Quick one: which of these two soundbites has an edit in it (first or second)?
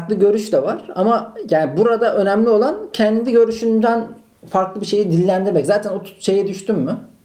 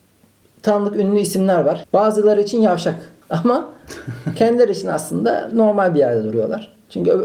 second